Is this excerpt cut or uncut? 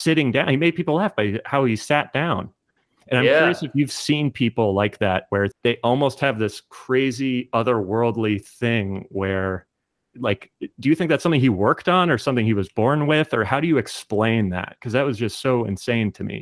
cut